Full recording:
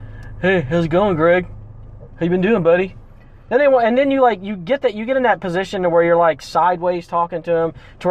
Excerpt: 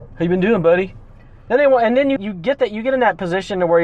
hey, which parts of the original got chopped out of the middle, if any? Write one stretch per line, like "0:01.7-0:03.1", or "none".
0:04.2-0:04.4